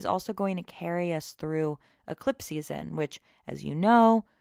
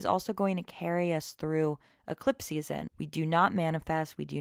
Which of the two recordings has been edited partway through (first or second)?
second